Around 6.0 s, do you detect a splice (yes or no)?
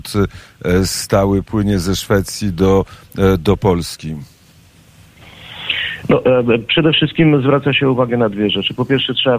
yes